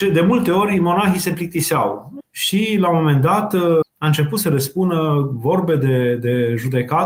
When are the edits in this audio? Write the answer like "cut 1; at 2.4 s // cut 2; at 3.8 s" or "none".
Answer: cut 1; at 2.2 s // cut 2; at 3.8 s